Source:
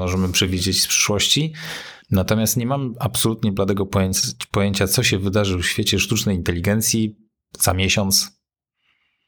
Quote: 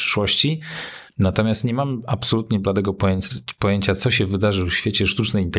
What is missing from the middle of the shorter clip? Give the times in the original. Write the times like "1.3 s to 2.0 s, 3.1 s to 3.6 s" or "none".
none